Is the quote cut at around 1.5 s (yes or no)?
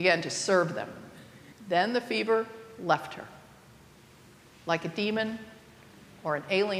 yes